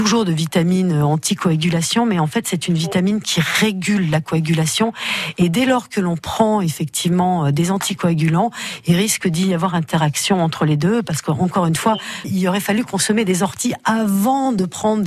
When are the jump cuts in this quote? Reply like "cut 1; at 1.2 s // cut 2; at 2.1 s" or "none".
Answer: cut 1; at 12.2 s